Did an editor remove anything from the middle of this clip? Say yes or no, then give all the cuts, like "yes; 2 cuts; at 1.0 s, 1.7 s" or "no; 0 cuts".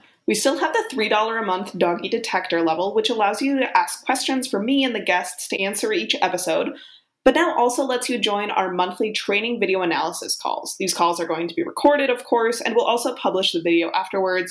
no; 0 cuts